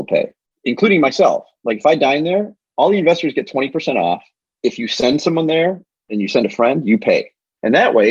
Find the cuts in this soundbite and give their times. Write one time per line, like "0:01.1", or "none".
none